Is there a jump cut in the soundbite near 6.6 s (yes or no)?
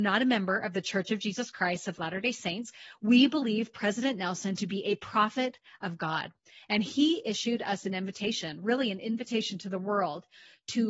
no